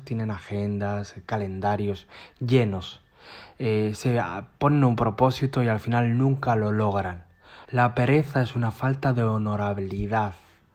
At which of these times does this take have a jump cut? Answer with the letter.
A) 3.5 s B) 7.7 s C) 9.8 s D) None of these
B